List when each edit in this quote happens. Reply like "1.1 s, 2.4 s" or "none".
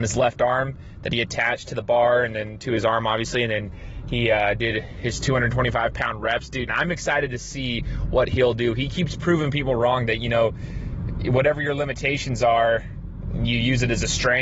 6.7 s

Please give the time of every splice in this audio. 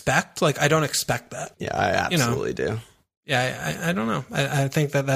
1.5 s

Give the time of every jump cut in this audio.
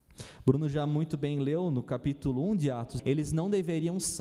3.0 s

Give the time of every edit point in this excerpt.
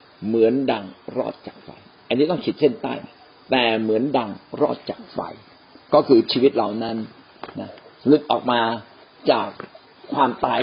none

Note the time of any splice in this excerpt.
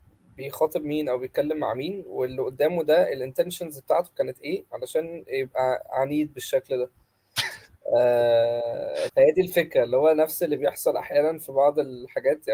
9.1 s

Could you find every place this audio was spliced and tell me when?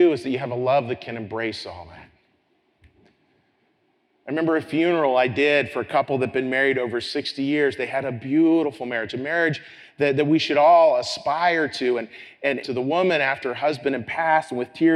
12.6 s

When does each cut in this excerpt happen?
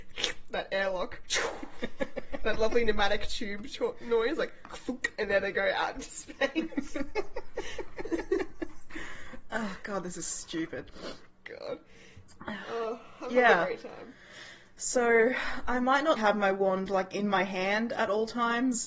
16.2 s

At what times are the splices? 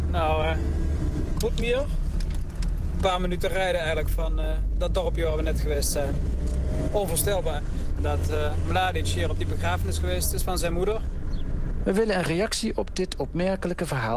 1.3 s, 11.8 s

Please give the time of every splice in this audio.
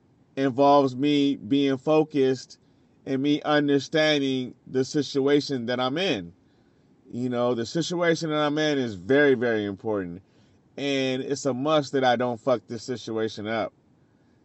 none

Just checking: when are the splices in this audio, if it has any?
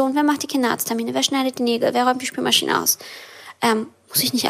none

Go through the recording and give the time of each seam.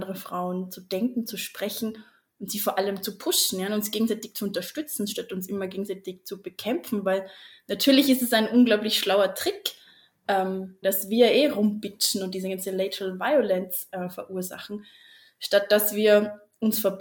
10.8 s

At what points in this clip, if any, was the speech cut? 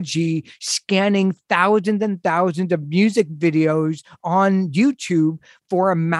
none

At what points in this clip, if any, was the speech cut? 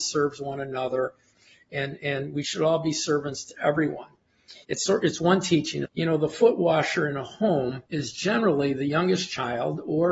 4.6 s, 5.9 s, 7.9 s

